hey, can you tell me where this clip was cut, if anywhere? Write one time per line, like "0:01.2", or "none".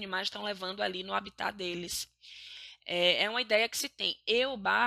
none